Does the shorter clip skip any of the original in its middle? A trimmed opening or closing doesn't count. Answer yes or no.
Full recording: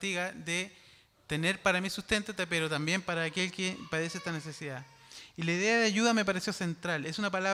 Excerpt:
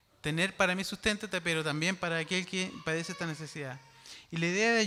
no